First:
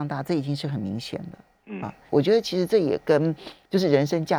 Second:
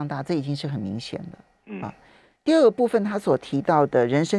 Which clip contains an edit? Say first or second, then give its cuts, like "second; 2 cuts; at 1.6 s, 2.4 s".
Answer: first; 1 cut; at 2.1 s